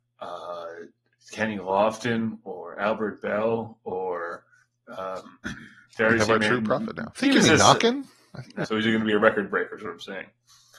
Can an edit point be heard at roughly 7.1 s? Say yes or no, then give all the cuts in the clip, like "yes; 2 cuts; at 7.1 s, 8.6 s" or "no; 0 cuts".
yes; 2 cuts; at 7.1 s, 8.6 s